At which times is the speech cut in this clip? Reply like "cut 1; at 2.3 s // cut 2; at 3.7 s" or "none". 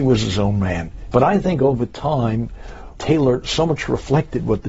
cut 1; at 1.1 s // cut 2; at 3.0 s

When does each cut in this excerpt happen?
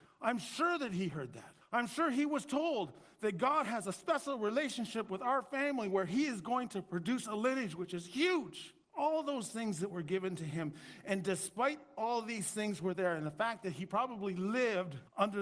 none

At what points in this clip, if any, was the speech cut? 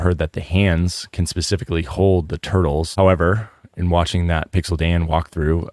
cut 1; at 2.9 s

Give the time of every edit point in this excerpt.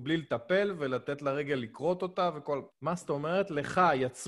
cut 1; at 2.7 s

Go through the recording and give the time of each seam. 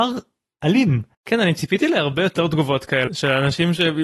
cut 1; at 1.1 s // cut 2; at 3.1 s

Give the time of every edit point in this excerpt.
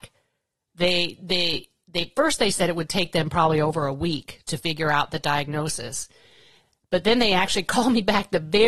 none

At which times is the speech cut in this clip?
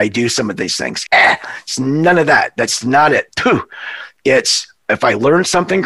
cut 1; at 1.1 s

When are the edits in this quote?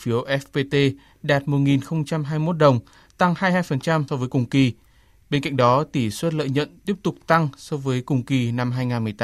cut 1; at 4.1 s

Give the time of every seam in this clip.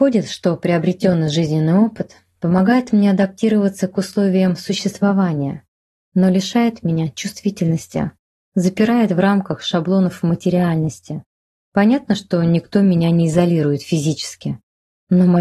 cut 1; at 11.5 s

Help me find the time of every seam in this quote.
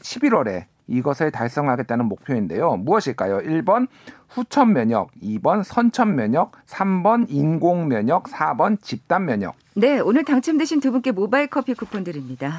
cut 1; at 6.6 s

